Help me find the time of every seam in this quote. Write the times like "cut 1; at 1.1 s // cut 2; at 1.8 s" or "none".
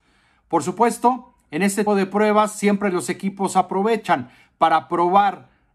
cut 1; at 1.9 s